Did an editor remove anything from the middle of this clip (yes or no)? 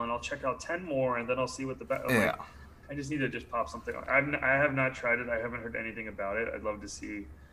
yes